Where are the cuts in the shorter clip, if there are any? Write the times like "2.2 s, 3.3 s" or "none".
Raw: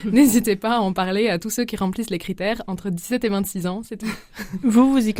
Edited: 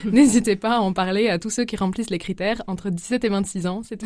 none